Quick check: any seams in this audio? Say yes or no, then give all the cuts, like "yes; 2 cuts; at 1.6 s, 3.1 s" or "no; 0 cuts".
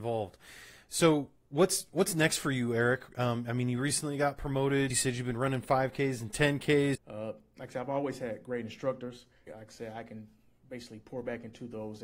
yes; 3 cuts; at 4.9 s, 6.9 s, 9.5 s